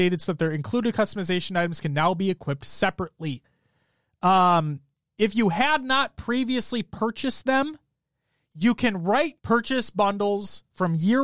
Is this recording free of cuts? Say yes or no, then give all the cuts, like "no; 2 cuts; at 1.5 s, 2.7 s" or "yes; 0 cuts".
no; 1 cut; at 9.4 s